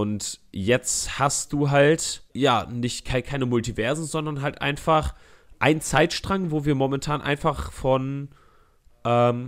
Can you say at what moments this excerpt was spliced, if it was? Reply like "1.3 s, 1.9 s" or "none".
2.3 s